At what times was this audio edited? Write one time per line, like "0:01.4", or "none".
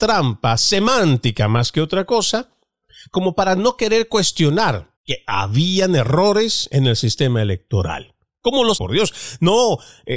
0:05.0
0:08.8